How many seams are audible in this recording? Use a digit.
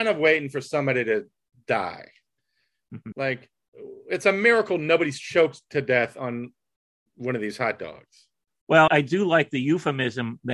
2